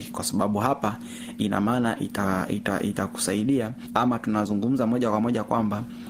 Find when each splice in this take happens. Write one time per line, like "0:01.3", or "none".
none